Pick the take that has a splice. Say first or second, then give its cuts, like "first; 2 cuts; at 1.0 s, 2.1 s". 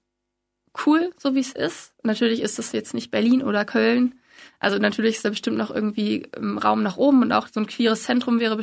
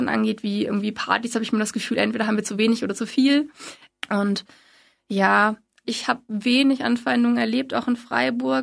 second; 2 cuts; at 3.9 s, 5.8 s